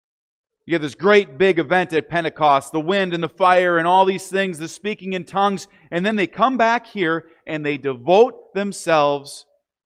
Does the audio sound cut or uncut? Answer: uncut